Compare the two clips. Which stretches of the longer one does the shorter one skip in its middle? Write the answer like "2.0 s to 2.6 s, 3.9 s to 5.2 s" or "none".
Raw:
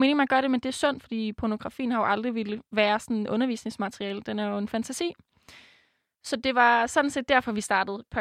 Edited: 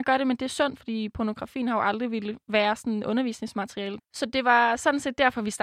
4.2 s to 6.1 s

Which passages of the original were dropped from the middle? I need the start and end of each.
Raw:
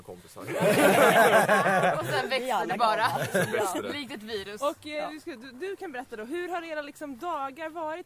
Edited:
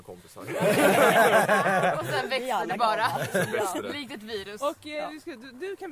none

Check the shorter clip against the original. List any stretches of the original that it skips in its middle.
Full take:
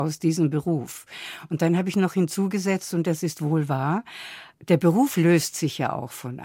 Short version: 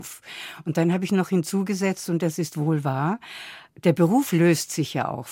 none

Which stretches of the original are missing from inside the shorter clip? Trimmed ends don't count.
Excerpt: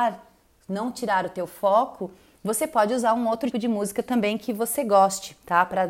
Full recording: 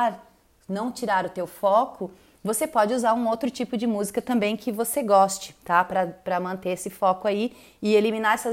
3.5 s to 3.7 s

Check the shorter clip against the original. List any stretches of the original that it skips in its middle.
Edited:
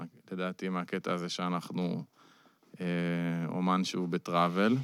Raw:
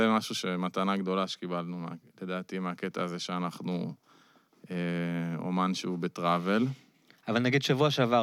none

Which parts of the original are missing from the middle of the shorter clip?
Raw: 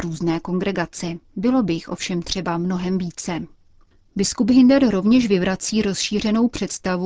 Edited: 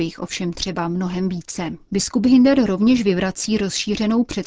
3.5 s to 4.1 s

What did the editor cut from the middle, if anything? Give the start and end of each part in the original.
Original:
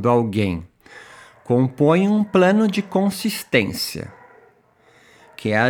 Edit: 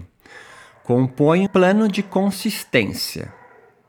2.1 s to 2.3 s

